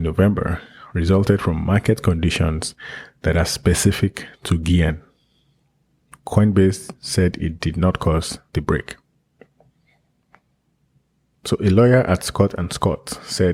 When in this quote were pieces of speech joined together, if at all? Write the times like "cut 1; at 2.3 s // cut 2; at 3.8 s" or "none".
none